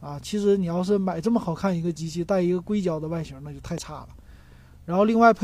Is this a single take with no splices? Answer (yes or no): yes